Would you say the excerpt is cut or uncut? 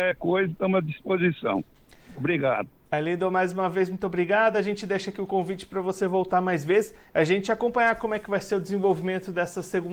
uncut